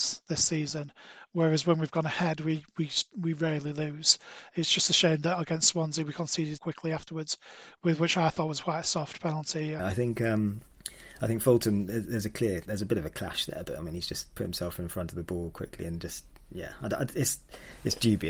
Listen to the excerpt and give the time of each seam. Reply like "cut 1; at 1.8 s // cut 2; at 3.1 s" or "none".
cut 1; at 6.6 s // cut 2; at 9.8 s